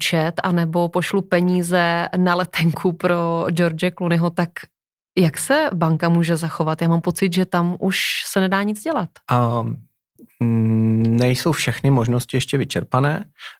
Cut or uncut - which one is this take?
uncut